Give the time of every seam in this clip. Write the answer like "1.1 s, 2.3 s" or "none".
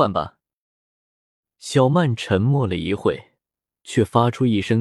none